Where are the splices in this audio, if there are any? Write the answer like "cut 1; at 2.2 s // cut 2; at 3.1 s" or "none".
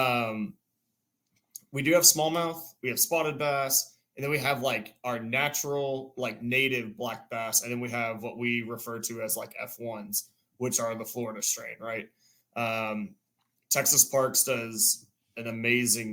none